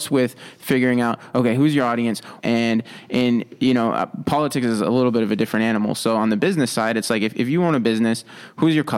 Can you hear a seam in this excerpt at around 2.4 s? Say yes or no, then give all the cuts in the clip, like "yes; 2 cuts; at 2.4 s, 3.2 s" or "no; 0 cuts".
yes; 1 cut; at 2.4 s